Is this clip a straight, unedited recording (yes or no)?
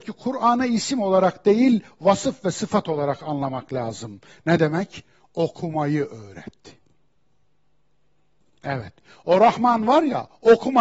yes